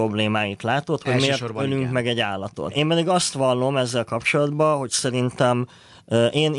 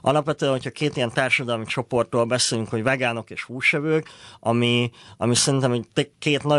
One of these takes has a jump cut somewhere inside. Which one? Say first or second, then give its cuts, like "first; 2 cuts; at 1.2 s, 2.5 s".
first; 1 cut; at 2.7 s